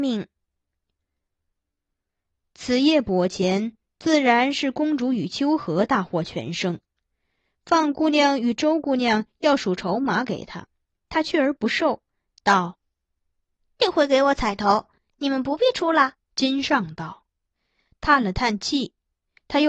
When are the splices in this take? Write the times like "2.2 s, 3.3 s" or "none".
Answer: 13.8 s, 16.2 s